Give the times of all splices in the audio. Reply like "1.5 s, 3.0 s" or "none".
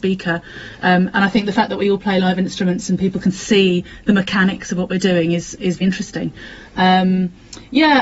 5.8 s